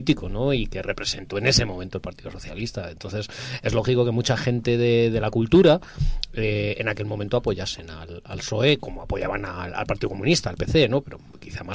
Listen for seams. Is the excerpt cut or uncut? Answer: uncut